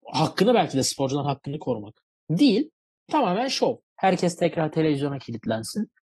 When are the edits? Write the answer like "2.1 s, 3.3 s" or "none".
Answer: 3.8 s